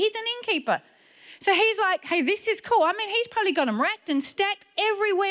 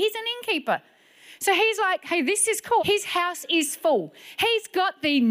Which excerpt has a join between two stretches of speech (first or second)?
second